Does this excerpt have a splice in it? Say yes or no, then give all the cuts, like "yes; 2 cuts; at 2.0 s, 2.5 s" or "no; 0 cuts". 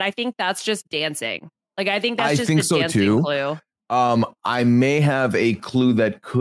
no; 0 cuts